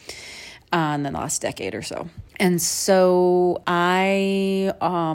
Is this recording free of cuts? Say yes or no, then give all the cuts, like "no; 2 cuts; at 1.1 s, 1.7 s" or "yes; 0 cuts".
no; 1 cut; at 2.3 s